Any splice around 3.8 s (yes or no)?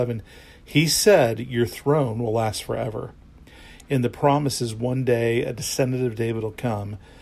yes